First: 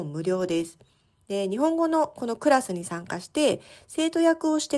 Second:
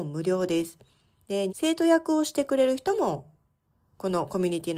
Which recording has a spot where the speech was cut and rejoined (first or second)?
second